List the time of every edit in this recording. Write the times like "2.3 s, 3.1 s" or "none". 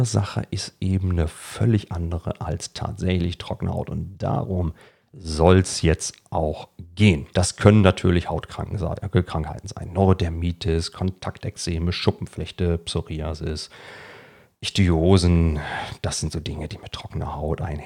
7.3 s

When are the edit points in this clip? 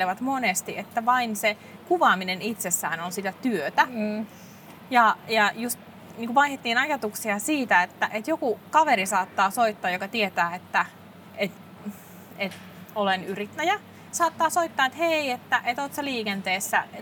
14.1 s

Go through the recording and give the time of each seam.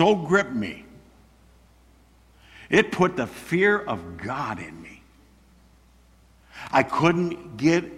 none

